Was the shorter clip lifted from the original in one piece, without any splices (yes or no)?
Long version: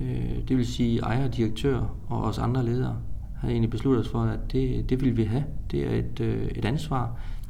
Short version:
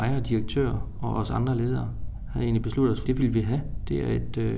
no